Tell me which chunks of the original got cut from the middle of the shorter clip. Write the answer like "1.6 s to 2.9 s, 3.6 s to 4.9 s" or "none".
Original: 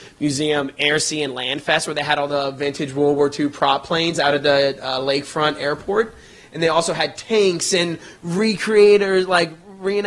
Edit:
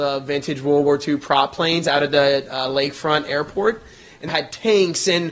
6.6 s to 6.9 s